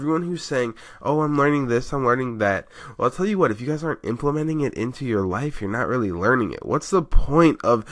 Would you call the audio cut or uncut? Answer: uncut